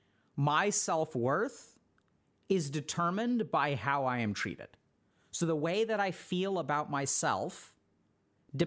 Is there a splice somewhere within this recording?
no; 0 cuts

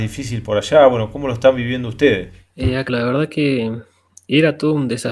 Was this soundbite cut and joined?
yes; 1 cut; at 2.9 s

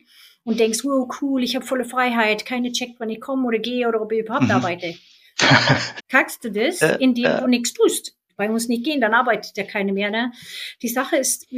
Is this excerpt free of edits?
no; 2 cuts; at 6.0 s, 8.3 s

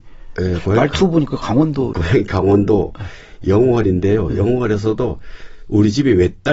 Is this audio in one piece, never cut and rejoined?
no; 1 cut; at 1.9 s

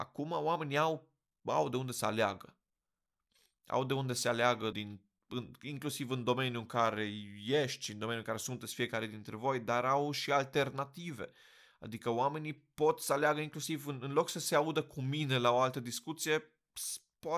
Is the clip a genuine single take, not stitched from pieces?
no; 1 cut; at 4.7 s

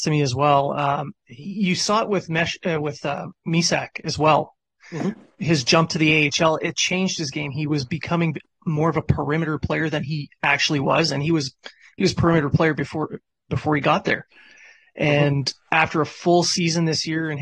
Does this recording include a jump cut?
no; 0 cuts

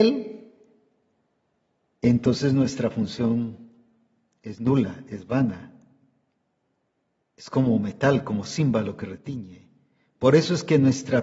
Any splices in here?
no; 0 cuts

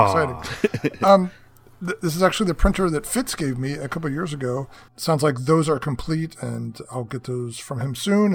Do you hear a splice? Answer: yes; 1 cut; at 4.9 s

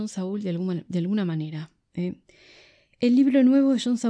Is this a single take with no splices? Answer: yes; 0 cuts

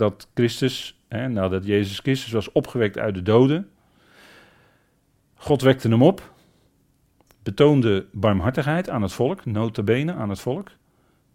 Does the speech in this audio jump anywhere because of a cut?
no; 0 cuts

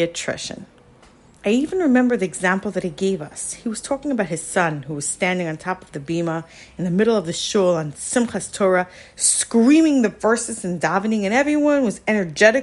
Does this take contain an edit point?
yes; 1 cut; at 1.4 s

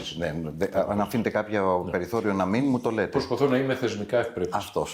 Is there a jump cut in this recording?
no; 0 cuts

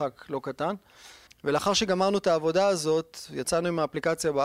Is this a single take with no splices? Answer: no; 1 cut; at 1.3 s

